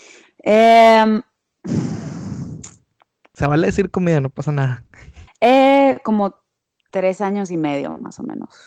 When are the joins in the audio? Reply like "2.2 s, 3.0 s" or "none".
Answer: 5.3 s